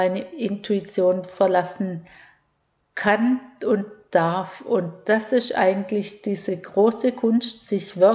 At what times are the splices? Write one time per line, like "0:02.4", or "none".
none